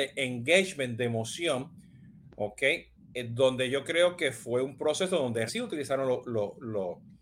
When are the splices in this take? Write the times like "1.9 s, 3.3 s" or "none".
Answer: 5.5 s